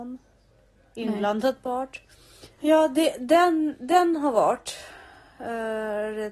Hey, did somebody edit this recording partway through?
yes; 1 cut; at 2.6 s

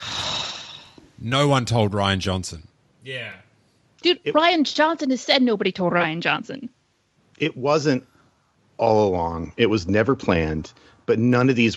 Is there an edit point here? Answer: no; 0 cuts

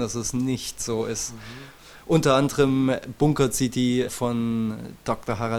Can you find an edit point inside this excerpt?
no; 0 cuts

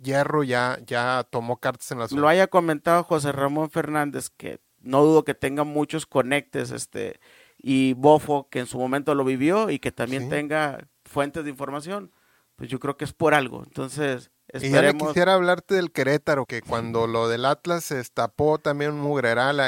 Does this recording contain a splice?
yes; 2 cuts; at 2.2 s, 16.5 s

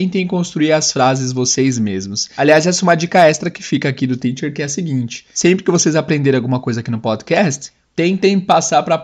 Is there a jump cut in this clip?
no; 0 cuts

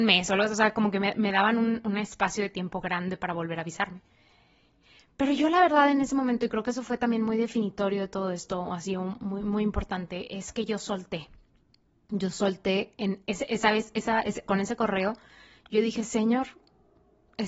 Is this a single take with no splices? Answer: yes; 0 cuts

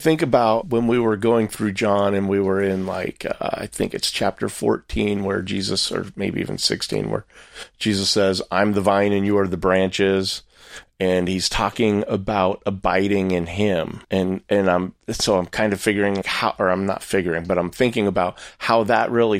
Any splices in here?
yes; 2 cuts; at 14.0 s, 16.2 s

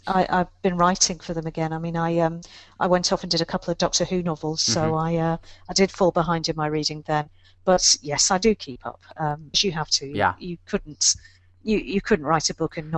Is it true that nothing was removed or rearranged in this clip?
no; 1 cut; at 9.5 s

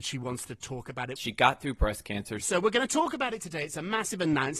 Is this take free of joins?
no; 2 cuts; at 1.2 s, 2.4 s

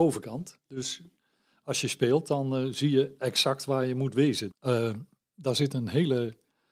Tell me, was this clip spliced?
yes; 1 cut; at 4.5 s

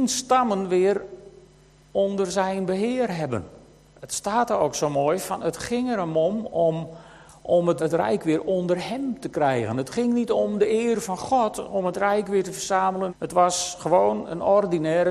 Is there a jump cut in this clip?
yes; 2 cuts; at 7.8 s, 13.1 s

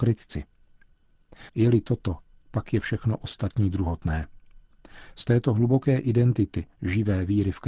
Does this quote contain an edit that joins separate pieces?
yes; 1 cut; at 1.5 s

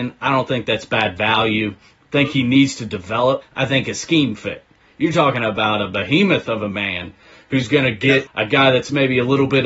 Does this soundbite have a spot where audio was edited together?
yes; 2 cuts; at 3.4 s, 8.3 s

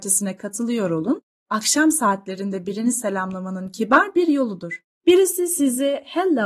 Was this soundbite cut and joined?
yes; 2 cuts; at 1.4 s, 4.9 s

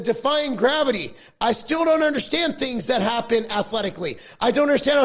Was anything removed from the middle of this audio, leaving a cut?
no; 0 cuts

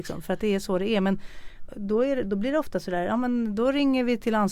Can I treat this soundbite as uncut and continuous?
no; 1 cut; at 1.7 s

